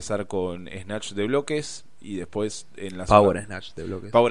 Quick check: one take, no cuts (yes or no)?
yes